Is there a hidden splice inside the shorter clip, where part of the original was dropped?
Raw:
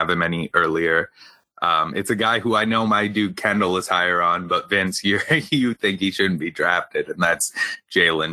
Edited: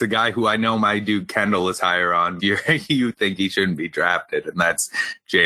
yes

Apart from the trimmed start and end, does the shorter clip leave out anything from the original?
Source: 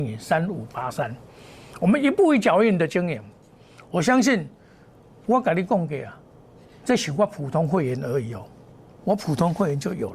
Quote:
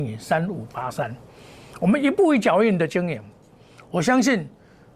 no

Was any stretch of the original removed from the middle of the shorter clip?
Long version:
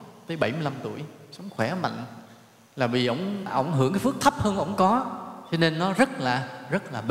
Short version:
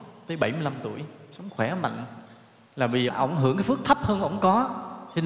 yes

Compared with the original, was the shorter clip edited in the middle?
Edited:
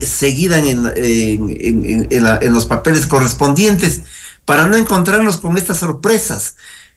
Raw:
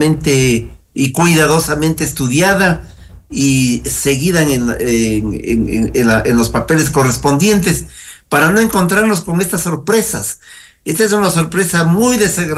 no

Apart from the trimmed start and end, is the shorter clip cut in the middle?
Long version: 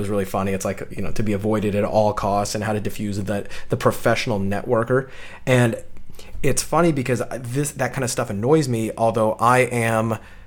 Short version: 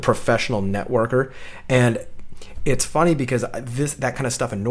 no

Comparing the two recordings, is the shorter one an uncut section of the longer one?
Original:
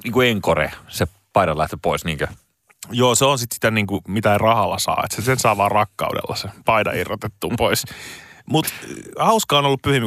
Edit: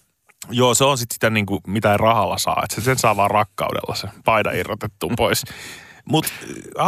yes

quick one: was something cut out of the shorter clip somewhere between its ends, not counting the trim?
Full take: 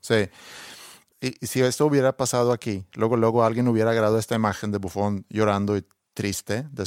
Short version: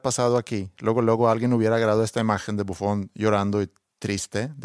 no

